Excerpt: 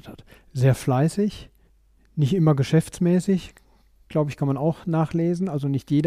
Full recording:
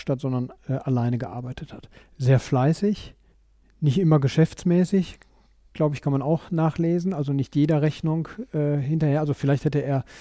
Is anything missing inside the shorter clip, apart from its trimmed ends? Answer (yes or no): no